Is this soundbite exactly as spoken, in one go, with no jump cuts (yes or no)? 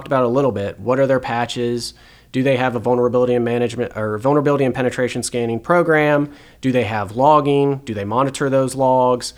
yes